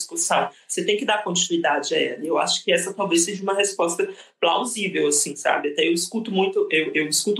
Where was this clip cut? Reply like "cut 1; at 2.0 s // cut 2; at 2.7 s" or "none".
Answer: none